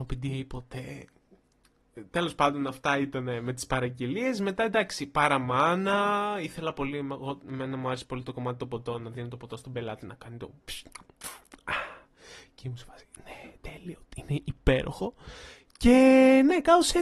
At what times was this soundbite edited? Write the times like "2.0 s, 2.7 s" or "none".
none